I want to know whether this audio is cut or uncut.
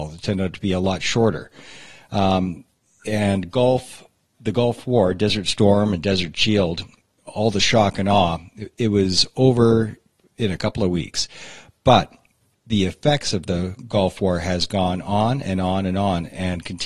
uncut